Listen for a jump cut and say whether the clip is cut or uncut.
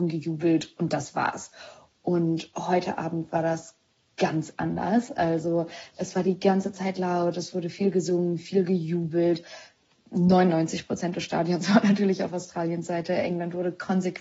uncut